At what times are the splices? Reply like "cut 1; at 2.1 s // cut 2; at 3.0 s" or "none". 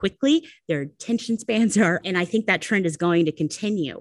cut 1; at 2.0 s

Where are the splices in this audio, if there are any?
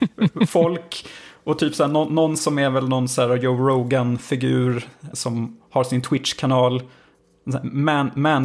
cut 1; at 5.1 s

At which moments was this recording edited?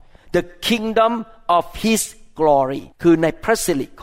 cut 1; at 2.9 s

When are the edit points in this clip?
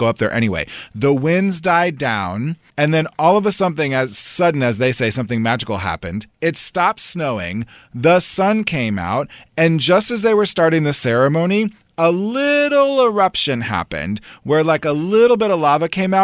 cut 1; at 2.7 s

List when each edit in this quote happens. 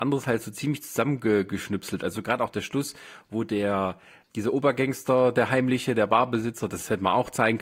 cut 1; at 4.3 s

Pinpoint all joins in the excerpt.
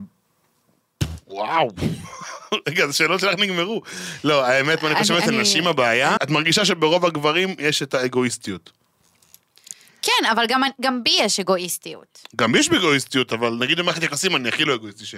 cut 1; at 6.2 s

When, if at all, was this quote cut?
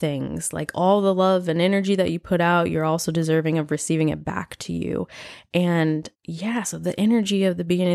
cut 1; at 6.1 s

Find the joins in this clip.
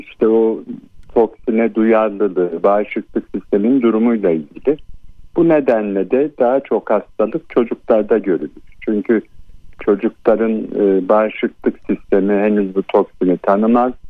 none

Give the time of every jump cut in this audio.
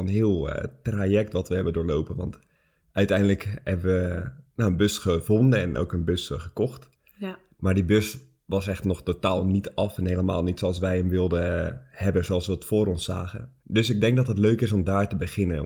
cut 1; at 13.6 s

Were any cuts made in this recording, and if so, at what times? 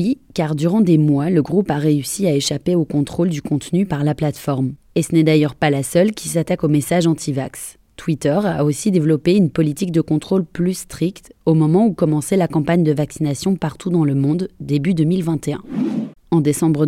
none

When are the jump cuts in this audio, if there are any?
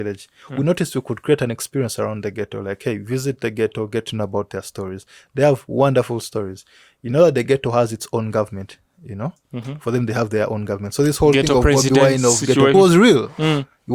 cut 1; at 12.7 s

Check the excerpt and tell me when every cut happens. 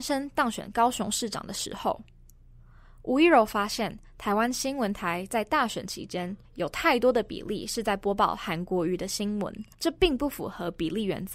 cut 1; at 6.4 s // cut 2; at 9.7 s

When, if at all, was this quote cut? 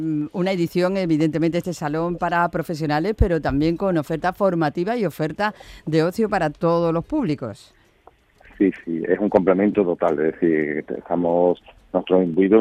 none

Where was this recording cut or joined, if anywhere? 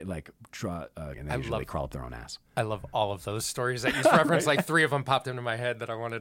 cut 1; at 1.1 s // cut 2; at 4.0 s

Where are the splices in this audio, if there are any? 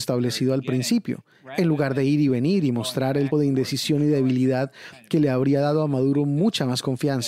cut 1; at 3.3 s

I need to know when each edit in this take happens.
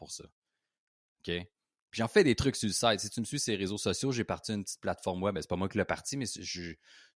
none

